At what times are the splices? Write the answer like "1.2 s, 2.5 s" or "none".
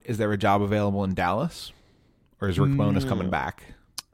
none